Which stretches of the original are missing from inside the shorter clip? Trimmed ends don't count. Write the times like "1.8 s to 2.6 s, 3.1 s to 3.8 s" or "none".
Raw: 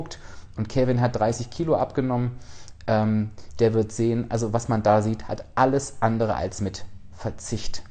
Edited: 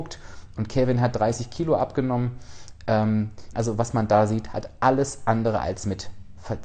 3.5 s to 4.3 s